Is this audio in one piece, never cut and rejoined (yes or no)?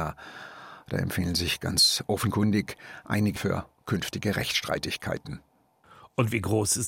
no